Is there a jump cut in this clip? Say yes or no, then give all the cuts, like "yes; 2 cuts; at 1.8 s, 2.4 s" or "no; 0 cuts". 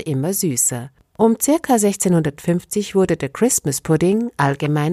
no; 0 cuts